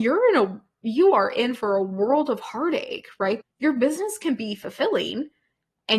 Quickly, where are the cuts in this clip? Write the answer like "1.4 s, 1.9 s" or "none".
3.4 s